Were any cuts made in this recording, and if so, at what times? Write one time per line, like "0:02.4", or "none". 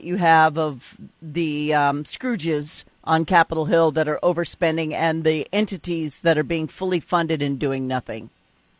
none